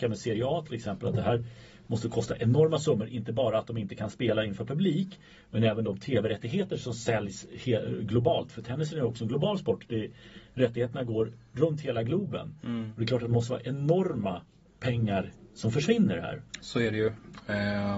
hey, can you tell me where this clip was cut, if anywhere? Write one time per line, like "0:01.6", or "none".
none